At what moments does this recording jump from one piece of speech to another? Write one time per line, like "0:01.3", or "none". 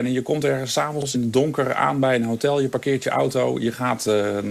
none